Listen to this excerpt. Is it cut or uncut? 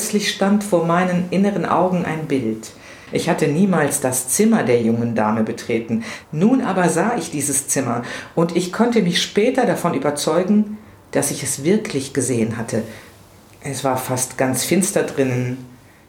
uncut